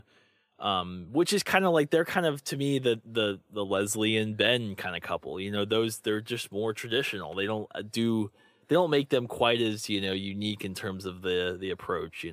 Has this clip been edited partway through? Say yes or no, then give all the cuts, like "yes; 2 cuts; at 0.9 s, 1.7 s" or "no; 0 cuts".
no; 0 cuts